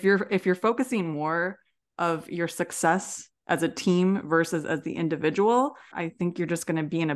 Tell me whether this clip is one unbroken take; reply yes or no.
no